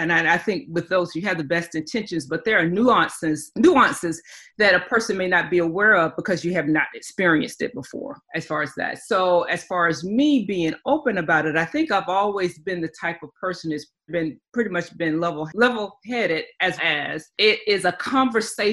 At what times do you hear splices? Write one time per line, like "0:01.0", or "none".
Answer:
0:14.1
0:16.8